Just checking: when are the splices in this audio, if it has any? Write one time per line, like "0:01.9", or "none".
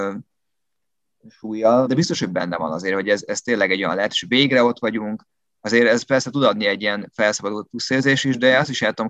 0:01.9